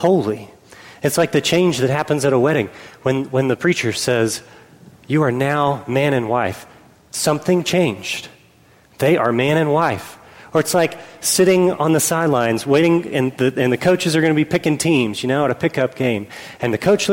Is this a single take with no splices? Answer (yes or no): yes